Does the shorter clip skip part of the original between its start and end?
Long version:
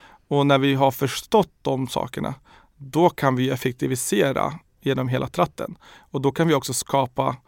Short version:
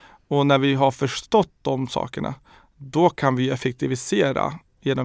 no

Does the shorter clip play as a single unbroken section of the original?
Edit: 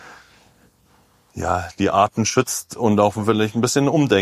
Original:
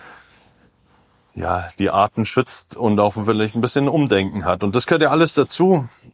yes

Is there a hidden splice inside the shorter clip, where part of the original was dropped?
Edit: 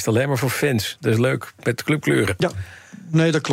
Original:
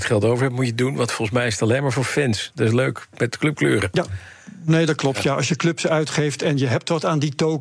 no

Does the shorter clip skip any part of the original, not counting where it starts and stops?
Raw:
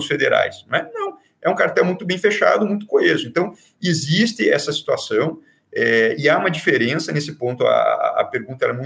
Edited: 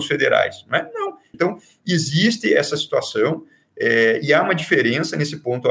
yes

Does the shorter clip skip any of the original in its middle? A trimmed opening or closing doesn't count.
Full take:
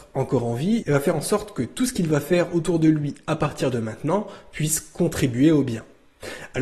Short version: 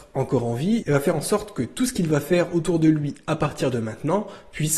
no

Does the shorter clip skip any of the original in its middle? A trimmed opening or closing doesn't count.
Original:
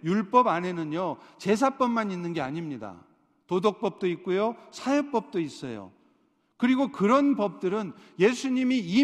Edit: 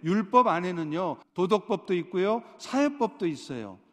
yes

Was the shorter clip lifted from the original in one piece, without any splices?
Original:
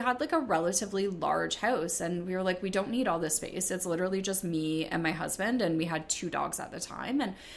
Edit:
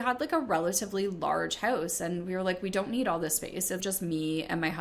no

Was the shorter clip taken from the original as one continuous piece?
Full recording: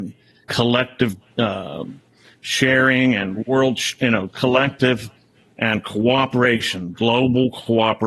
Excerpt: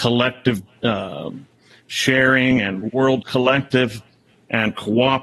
no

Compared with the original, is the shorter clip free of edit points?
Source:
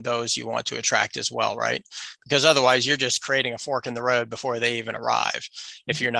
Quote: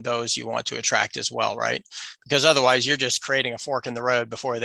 yes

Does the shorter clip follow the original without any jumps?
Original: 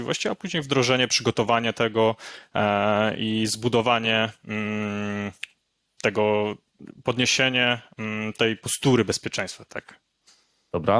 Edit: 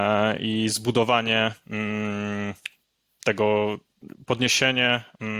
yes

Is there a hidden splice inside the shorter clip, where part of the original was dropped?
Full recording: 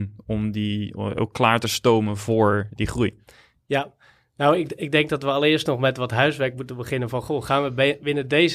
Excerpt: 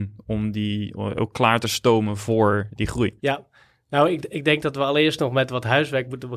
yes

